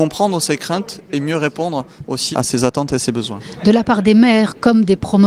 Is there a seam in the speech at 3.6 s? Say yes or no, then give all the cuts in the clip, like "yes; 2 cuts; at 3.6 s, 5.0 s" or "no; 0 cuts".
no; 1 cut; at 2.3 s